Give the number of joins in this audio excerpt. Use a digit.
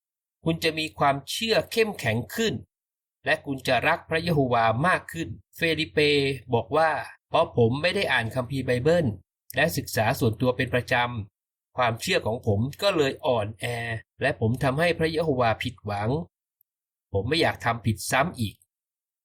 3